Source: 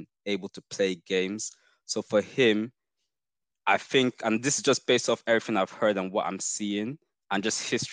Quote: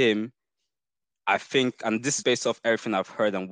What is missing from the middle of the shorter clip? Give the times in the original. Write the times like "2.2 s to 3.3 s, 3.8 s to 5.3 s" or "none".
4.6 s to 4.8 s